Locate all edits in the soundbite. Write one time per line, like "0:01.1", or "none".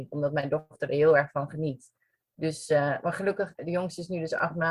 0:03.6